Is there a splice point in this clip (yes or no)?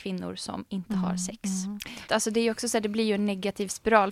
yes